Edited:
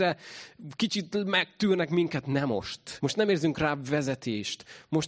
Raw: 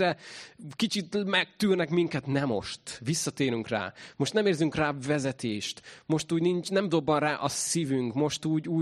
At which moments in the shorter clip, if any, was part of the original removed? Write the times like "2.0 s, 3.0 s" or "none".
3.0 s